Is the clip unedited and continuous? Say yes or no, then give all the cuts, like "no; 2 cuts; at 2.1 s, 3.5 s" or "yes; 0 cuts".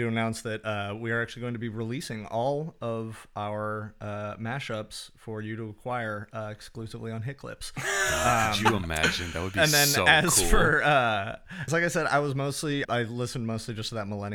no; 2 cuts; at 11.7 s, 12.8 s